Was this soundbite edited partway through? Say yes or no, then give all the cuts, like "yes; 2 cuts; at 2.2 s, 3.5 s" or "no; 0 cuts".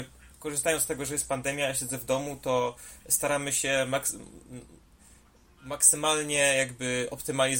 no; 0 cuts